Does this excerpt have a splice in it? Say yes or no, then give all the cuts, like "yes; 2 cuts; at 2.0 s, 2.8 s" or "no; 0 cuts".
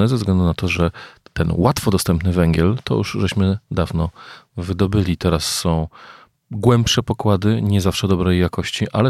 no; 0 cuts